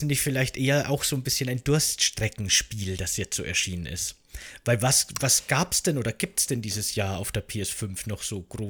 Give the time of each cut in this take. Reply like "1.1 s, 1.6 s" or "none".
none